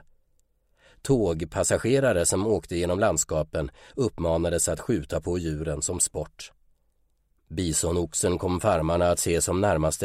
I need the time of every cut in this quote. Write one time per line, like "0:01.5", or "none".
0:07.3

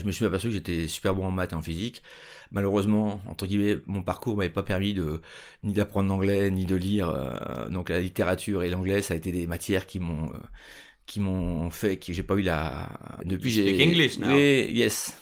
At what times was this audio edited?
0:13.2

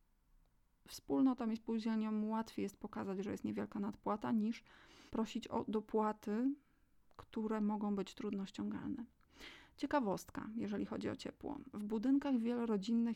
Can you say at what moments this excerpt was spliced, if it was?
0:05.1

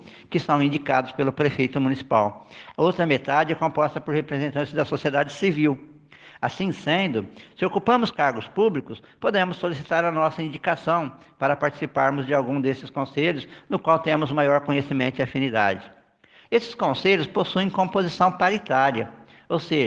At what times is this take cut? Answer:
0:16.4

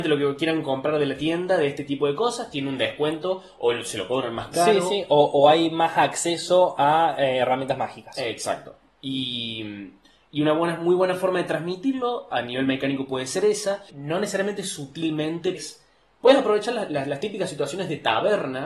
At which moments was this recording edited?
0:13.9
0:15.5

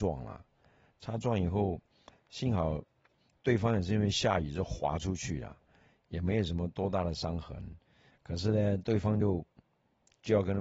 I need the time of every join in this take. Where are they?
none

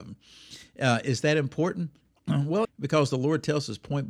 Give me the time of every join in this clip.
0:02.6

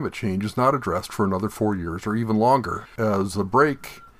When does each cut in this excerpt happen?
0:03.0

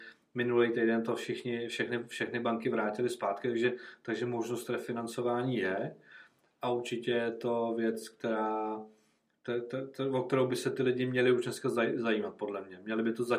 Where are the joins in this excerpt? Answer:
none

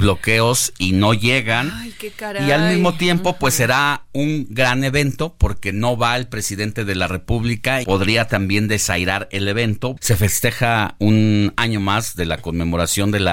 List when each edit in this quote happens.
0:07.8
0:10.0

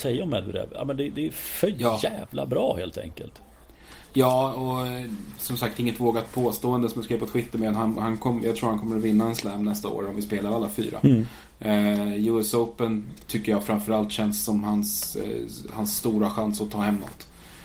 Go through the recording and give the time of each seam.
none

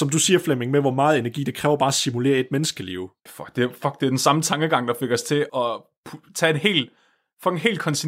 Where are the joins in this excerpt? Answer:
0:03.3
0:05.5

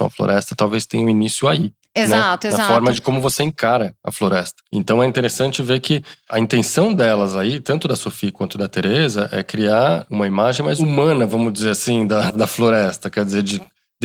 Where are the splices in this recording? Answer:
0:04.7
0:12.3

